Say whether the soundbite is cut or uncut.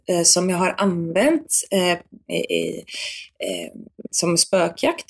cut